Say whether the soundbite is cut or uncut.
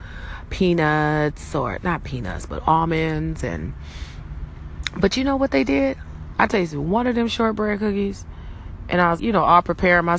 cut